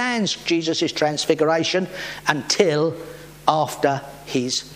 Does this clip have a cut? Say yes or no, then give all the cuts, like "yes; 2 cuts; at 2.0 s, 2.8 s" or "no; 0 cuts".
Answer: no; 0 cuts